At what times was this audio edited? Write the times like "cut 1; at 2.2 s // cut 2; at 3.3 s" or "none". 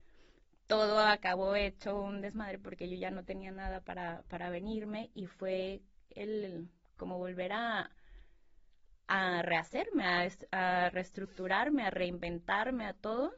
none